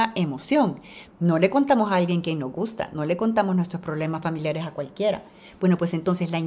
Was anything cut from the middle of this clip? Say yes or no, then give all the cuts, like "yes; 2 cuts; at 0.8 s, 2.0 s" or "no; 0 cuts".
yes; 1 cut; at 1.1 s